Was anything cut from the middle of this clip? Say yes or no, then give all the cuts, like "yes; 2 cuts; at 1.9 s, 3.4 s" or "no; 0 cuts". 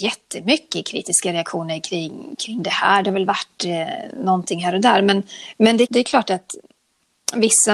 yes; 1 cut; at 5.8 s